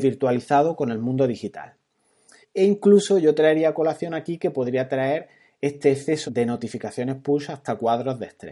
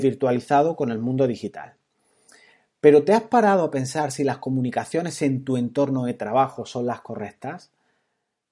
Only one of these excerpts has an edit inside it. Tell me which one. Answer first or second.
first